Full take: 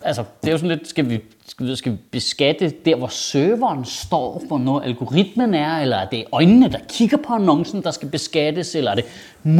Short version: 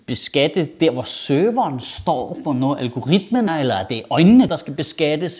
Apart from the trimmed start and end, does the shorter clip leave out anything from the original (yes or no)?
yes